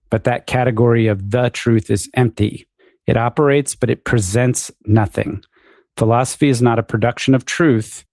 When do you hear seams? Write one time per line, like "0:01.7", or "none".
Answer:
none